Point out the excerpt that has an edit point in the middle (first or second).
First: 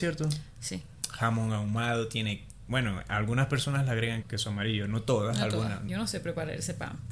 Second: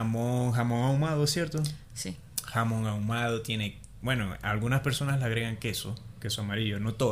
first